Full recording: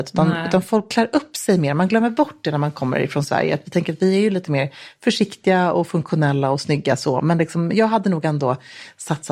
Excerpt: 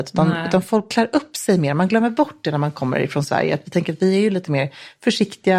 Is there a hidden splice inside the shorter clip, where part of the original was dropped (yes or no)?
no